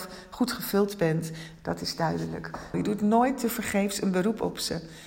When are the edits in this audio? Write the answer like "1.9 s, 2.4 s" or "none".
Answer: 1.6 s, 2.7 s